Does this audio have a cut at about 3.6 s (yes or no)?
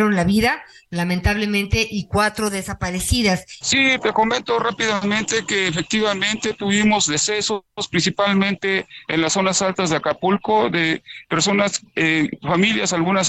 yes